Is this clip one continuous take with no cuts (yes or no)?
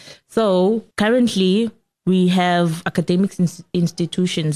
no